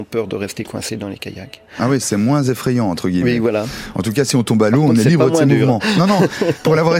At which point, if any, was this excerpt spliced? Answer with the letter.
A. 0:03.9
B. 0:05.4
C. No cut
C